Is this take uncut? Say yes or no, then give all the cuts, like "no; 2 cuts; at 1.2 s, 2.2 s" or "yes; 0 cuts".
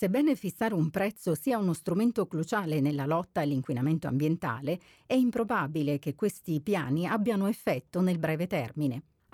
yes; 0 cuts